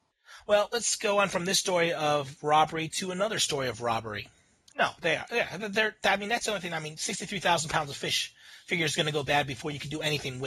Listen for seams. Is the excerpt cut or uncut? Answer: cut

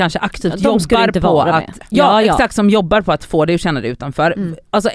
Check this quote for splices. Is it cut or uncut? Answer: cut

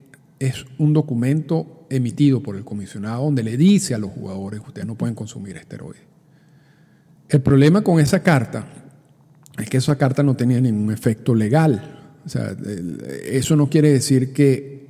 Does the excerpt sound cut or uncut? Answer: cut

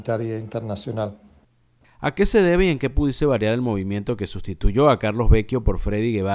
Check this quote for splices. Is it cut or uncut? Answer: uncut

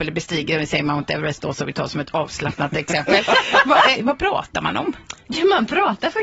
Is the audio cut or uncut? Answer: cut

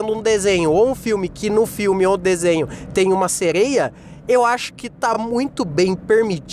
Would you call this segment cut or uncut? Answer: uncut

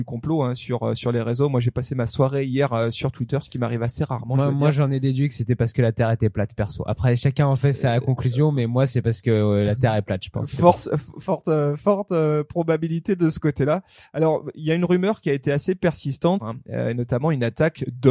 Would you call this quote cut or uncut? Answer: cut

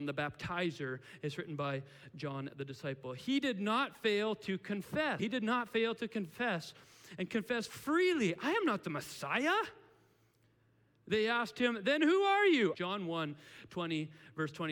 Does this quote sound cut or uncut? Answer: cut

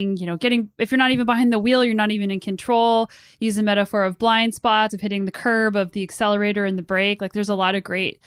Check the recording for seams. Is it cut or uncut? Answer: uncut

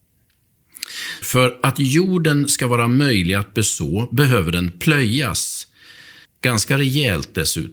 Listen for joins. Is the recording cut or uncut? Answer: cut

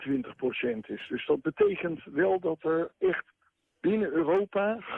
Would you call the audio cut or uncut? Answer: uncut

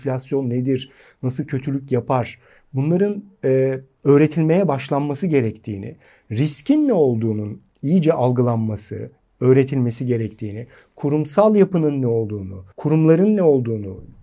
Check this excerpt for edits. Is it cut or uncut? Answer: cut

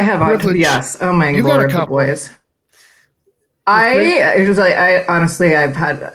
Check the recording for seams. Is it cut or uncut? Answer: uncut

